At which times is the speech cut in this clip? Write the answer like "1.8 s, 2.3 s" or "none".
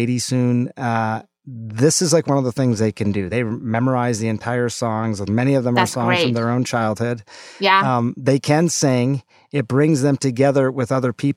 none